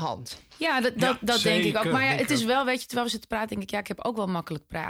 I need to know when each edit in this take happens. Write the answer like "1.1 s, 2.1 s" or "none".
none